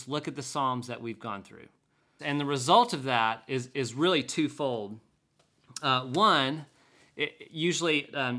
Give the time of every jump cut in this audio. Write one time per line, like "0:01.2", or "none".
0:02.2